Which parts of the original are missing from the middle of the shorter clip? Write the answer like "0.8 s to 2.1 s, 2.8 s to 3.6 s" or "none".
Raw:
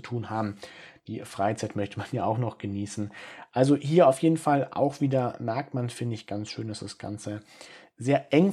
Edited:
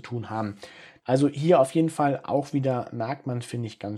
1.0 s to 3.5 s